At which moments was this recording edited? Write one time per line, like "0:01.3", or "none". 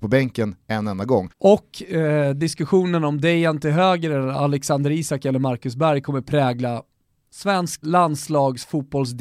0:01.3
0:07.8